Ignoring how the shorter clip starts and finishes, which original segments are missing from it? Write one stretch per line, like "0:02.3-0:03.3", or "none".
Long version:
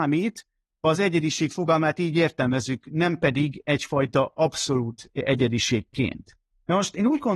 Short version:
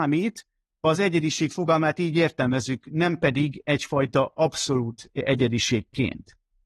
none